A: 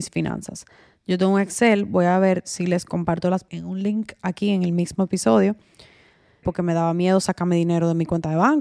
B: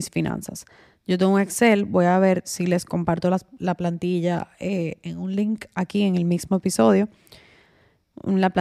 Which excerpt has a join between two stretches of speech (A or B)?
A